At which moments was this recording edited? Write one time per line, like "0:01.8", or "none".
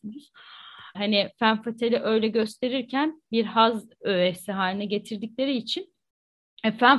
0:00.9